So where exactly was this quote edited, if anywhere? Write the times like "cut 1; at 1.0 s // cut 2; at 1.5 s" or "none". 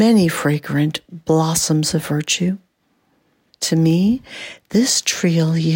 cut 1; at 3.5 s